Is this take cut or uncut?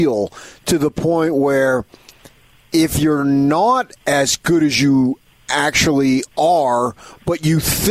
cut